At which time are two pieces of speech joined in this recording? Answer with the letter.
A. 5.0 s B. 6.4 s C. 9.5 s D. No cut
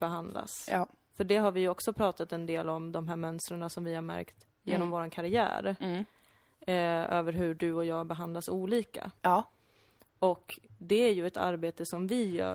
D